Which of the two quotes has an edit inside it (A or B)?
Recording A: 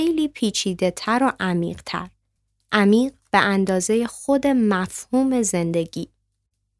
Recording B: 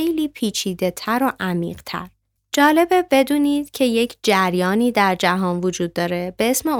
B